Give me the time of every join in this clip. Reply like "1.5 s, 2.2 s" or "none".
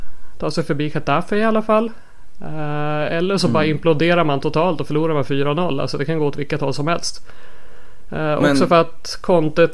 none